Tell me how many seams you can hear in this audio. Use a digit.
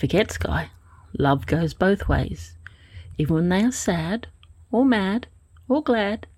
1